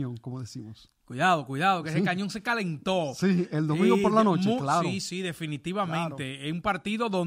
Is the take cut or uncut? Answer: uncut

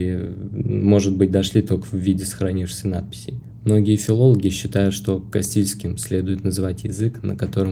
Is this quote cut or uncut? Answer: uncut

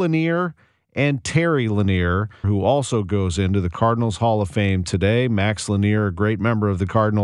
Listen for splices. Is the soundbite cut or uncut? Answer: cut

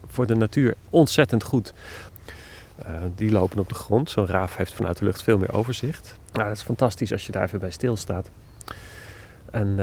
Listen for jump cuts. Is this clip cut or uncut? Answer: cut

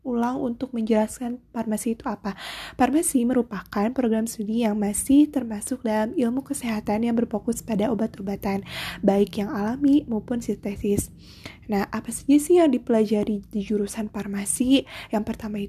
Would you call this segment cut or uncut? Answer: uncut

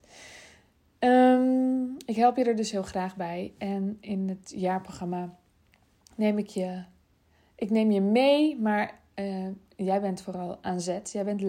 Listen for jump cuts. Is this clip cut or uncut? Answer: uncut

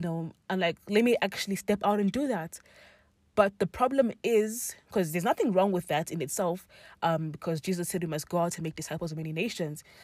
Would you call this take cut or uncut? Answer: uncut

